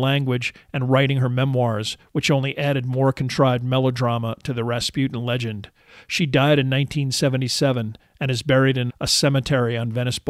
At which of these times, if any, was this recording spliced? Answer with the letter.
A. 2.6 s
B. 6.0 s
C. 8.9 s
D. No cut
C